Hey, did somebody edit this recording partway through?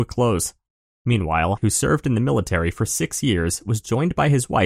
yes; 1 cut; at 1.6 s

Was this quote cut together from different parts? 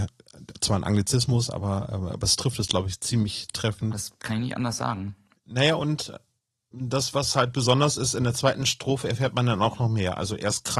yes; 1 cut; at 3.9 s

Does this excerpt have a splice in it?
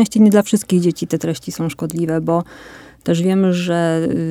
no; 0 cuts

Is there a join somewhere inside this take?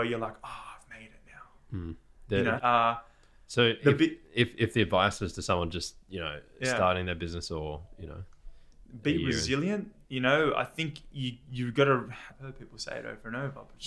yes; 3 cuts; at 2.6 s, 10.0 s, 12.3 s

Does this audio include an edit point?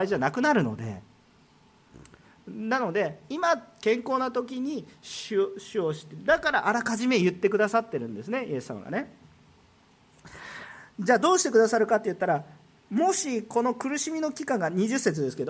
no; 0 cuts

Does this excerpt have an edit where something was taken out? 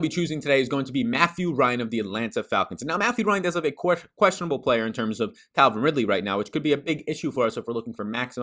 no; 0 cuts

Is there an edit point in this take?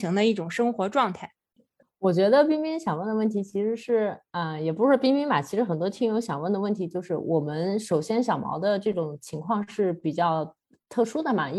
no; 0 cuts

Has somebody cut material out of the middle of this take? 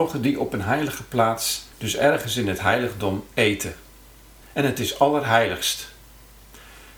yes; 2 cuts; at 1.7 s, 4.4 s

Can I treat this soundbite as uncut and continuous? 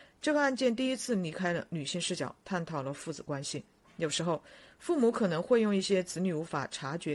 yes; 0 cuts

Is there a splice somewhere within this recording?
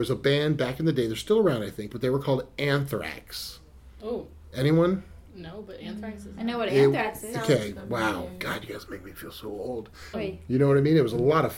yes; 1 cut; at 10.1 s

